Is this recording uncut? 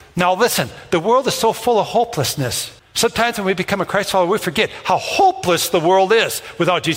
no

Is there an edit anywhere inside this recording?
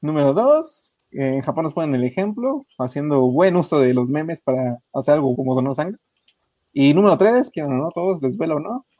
yes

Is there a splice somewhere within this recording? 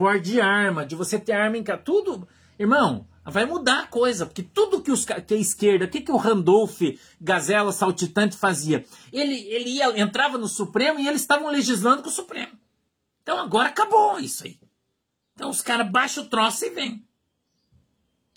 no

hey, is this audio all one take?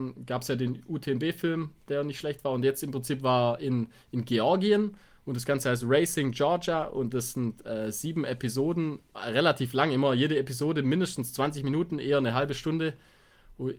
yes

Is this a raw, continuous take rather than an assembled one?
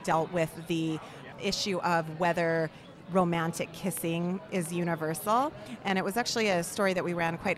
yes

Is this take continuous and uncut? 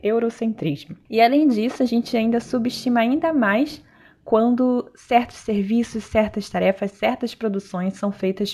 yes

